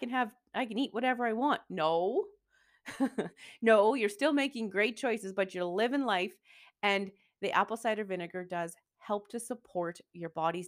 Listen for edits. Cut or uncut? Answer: uncut